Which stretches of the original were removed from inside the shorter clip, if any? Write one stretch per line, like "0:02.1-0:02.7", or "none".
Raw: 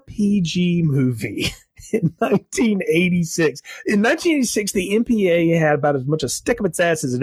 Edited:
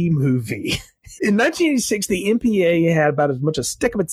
0:01.9-0:03.8